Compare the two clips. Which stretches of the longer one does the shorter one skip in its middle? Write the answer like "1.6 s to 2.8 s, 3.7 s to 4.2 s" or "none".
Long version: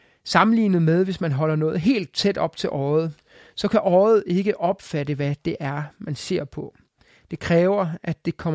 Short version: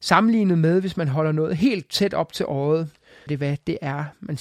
3.5 s to 5.1 s